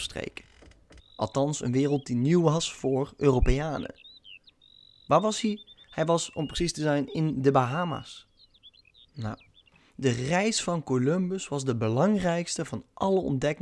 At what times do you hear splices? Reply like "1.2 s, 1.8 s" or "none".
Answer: 1.0 s

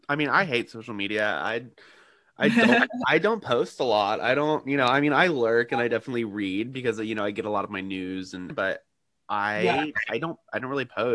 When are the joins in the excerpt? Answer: 8.5 s

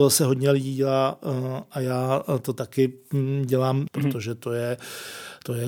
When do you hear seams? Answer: 3.9 s

